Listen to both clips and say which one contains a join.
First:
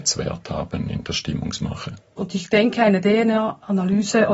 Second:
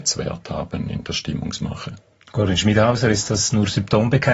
first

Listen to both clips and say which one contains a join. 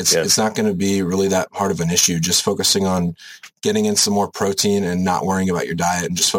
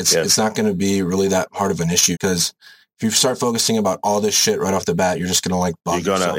second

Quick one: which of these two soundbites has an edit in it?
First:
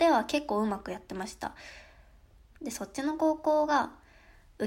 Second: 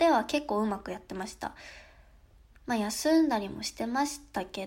first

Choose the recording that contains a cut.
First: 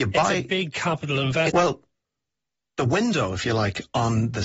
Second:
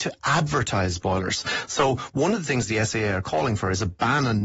first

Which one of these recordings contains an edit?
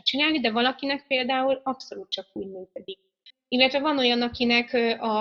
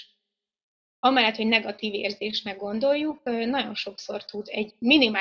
first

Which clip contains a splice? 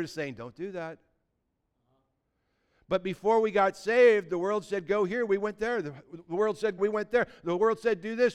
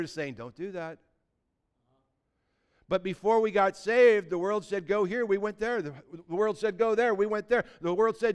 first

